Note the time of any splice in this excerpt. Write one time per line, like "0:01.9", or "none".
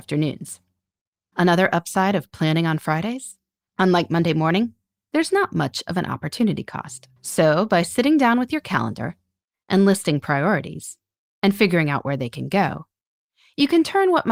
0:01.3
0:03.7
0:07.2